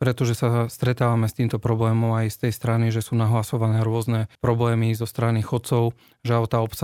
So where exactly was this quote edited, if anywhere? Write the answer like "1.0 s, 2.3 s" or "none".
4.4 s

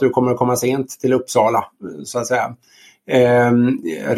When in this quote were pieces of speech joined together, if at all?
none

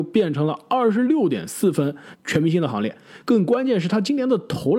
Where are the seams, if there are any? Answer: 2.1 s

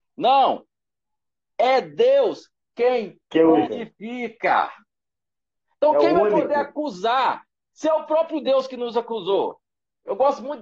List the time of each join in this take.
3.7 s, 7.7 s

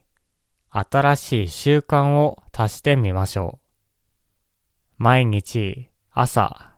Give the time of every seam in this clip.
4.8 s

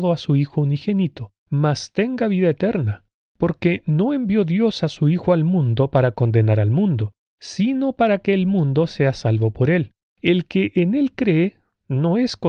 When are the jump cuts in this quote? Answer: 1.4 s

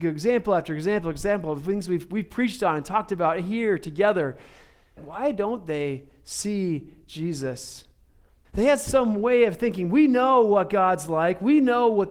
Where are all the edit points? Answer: 5.0 s, 8.4 s

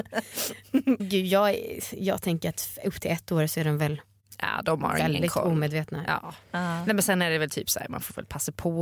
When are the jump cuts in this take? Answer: 1.0 s

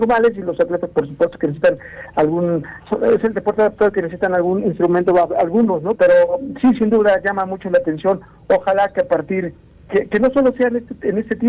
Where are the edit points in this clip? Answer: 6.0 s

